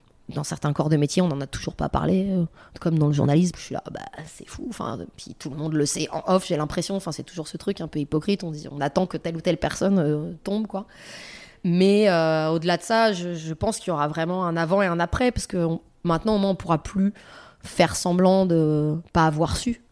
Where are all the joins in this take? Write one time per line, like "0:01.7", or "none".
0:03.5